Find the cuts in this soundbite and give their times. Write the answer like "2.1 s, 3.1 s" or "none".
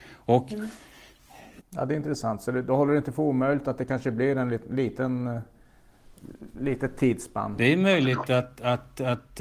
1.6 s